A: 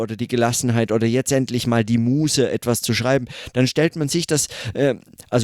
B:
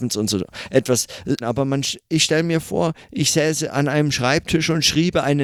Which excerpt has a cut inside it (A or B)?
B